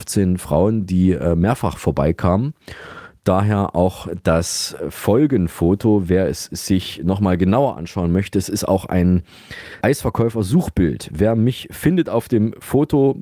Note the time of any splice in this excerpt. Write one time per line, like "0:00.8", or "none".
0:09.8